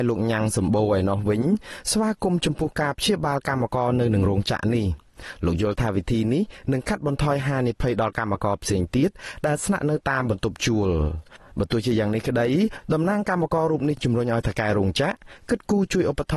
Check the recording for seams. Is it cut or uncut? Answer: uncut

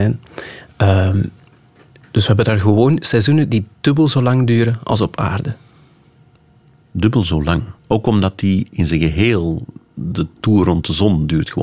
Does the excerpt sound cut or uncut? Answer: cut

